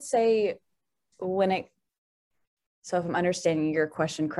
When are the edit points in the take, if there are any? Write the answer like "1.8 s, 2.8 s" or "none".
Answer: none